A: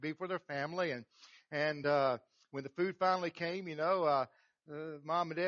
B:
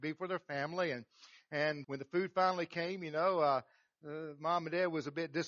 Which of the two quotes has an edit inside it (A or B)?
B